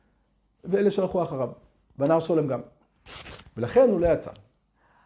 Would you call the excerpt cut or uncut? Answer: cut